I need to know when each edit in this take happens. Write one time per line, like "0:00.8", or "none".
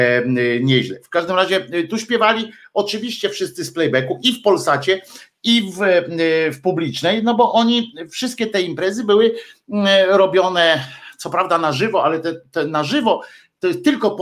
none